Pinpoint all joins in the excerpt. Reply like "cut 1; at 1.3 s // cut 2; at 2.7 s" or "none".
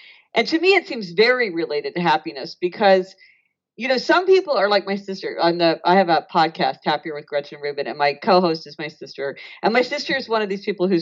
none

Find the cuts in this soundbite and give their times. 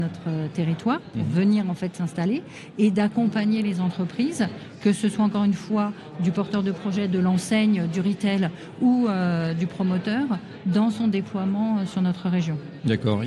none

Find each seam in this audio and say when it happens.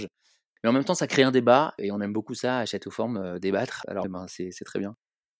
cut 1; at 4.0 s

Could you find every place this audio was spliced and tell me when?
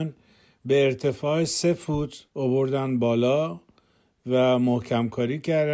cut 1; at 2.3 s

